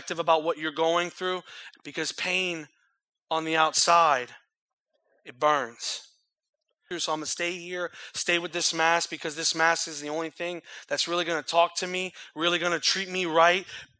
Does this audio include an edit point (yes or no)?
yes